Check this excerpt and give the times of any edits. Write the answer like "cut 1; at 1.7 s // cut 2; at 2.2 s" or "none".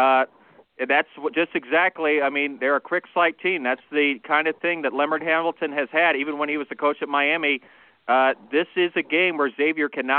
none